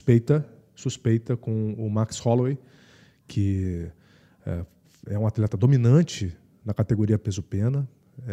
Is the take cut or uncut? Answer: uncut